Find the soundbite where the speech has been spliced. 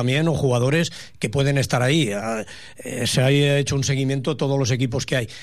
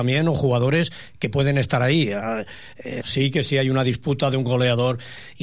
second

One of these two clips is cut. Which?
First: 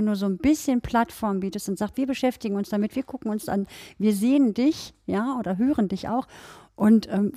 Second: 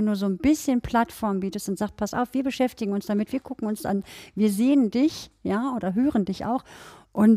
first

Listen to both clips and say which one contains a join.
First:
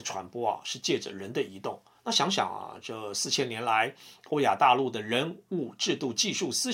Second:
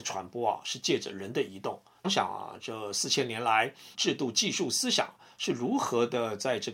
second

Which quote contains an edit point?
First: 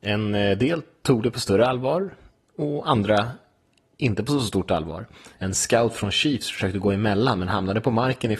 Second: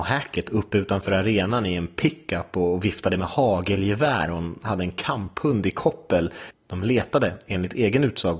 first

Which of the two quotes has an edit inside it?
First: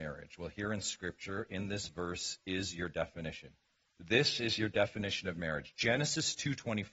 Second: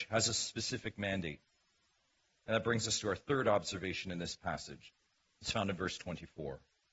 second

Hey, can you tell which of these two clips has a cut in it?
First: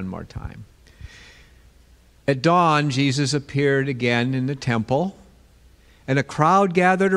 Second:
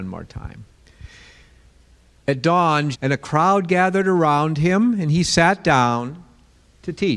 second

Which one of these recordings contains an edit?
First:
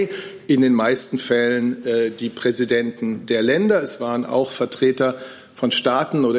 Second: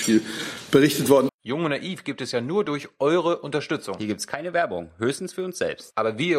second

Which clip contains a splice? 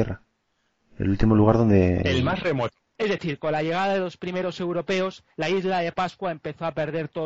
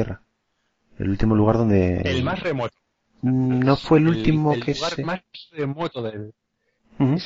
first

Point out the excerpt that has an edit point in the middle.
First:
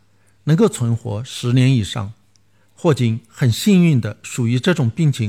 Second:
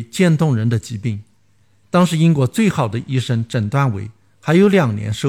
second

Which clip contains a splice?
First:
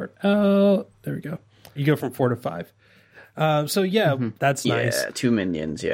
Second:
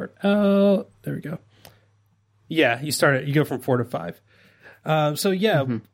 first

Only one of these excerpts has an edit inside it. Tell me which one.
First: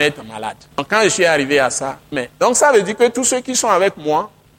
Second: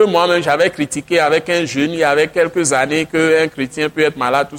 first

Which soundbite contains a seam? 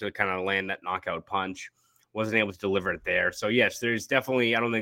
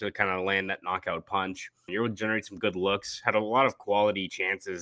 second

